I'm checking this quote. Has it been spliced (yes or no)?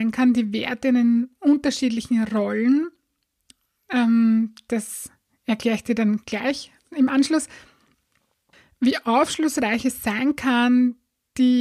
no